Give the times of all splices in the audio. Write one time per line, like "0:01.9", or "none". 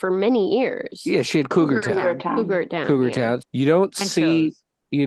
0:03.4